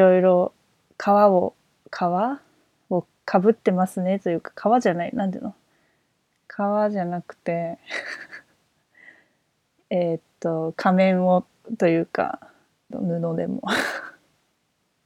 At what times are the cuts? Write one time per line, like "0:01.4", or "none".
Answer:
0:12.9

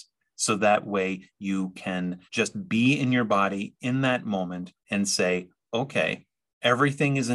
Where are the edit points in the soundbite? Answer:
0:02.3
0:04.8

